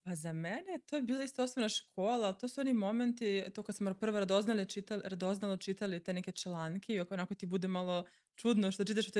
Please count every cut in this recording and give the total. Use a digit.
0